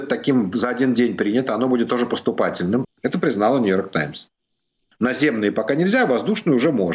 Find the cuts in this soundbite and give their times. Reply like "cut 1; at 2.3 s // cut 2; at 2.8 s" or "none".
cut 1; at 2.8 s // cut 2; at 4.9 s